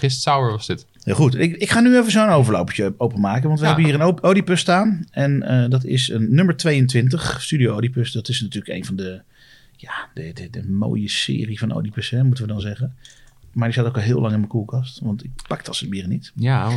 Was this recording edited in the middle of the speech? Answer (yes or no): no